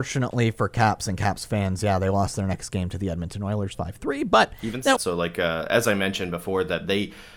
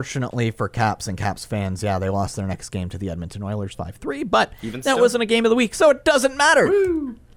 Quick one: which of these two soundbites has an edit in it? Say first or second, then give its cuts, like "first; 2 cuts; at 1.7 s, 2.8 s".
first; 1 cut; at 5.0 s